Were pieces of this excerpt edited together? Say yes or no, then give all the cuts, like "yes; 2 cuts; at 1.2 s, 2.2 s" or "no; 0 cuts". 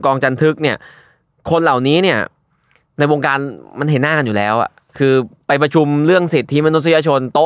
no; 0 cuts